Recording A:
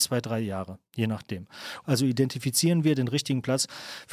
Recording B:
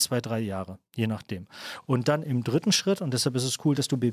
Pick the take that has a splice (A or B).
A